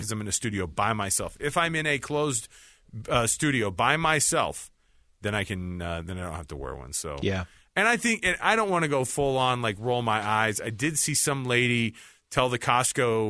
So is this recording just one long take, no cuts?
yes; 0 cuts

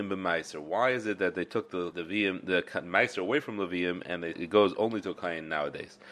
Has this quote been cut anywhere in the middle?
yes; 2 cuts; at 1.9 s, 4.3 s

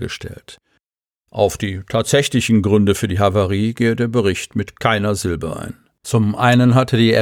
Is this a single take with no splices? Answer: yes; 0 cuts

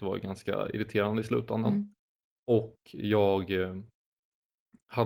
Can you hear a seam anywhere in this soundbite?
no; 0 cuts

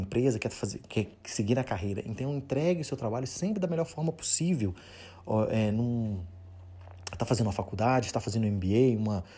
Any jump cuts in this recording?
no; 0 cuts

